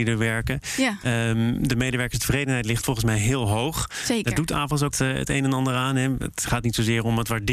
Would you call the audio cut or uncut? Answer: cut